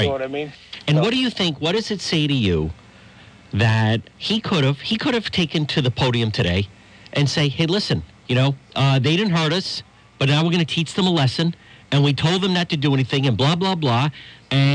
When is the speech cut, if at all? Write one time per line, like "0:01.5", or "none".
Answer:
none